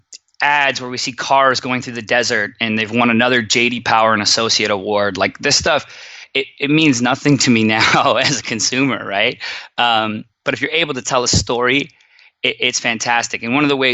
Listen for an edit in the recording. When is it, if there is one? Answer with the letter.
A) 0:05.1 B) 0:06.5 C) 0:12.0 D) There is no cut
D